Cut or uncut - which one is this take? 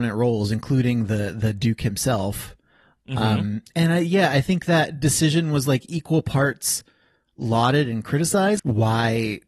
cut